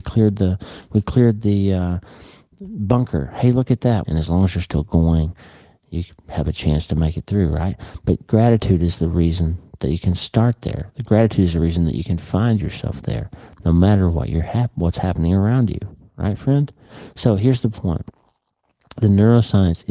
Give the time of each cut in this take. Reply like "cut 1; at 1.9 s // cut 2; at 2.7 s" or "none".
cut 1; at 4.0 s